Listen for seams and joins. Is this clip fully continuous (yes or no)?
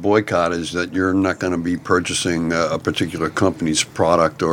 yes